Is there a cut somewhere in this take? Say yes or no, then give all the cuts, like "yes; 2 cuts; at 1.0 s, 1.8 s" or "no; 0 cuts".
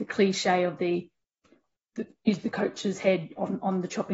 no; 0 cuts